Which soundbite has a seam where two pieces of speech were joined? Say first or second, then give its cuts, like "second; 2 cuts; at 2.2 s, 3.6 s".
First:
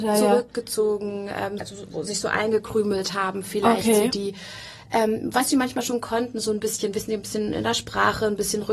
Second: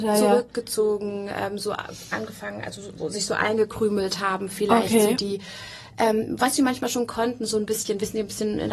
first; 1 cut; at 1.6 s